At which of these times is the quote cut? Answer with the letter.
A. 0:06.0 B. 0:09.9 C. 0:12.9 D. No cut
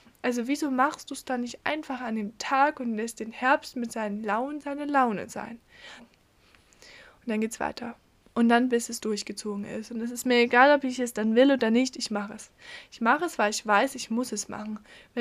A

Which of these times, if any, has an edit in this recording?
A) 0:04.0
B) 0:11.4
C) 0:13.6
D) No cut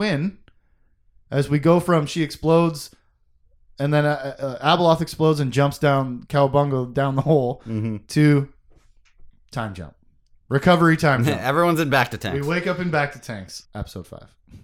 C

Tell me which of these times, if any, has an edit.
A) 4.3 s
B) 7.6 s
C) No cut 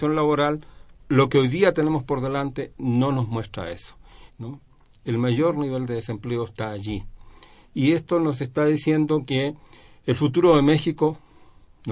A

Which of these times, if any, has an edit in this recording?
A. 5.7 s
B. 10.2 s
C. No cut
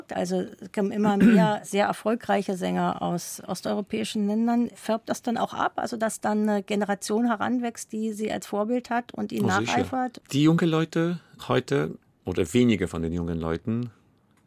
B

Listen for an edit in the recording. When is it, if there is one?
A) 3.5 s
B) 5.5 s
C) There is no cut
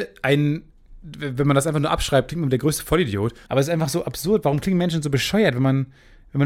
A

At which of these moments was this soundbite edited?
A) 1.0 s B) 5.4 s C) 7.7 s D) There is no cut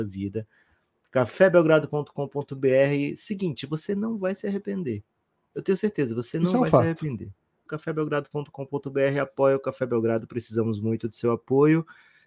C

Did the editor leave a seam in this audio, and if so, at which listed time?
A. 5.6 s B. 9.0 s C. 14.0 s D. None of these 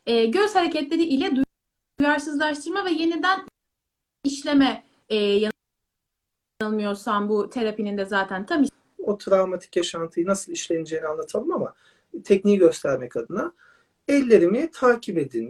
B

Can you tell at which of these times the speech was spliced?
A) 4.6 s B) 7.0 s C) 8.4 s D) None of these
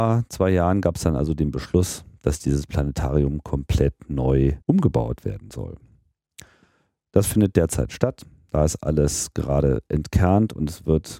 A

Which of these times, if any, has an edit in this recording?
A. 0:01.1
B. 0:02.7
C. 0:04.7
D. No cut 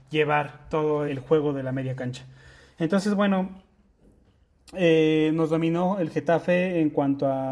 A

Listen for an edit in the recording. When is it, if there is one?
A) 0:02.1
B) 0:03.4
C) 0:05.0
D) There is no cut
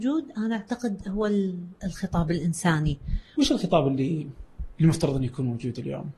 B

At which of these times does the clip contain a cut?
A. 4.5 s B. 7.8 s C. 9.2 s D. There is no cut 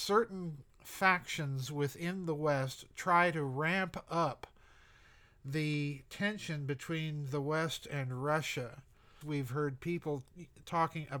C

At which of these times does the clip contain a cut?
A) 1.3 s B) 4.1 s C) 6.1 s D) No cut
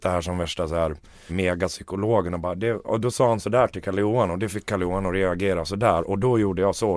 A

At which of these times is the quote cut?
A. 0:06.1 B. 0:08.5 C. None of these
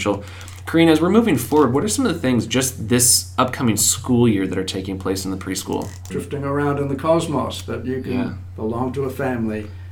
A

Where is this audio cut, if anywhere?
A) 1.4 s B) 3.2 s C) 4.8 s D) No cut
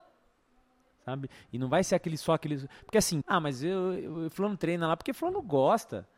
B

